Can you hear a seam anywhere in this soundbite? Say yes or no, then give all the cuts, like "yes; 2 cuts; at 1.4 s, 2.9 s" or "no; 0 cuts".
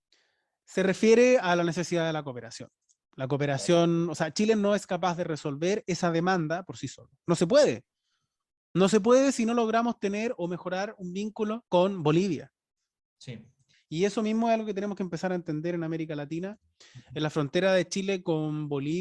yes; 3 cuts; at 11.7 s, 13.7 s, 16.8 s